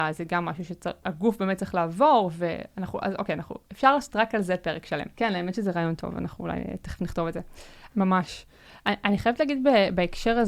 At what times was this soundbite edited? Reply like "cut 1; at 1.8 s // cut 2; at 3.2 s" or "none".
cut 1; at 5.1 s // cut 2; at 7.9 s